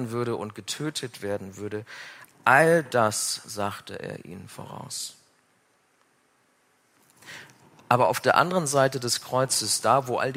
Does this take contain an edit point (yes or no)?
no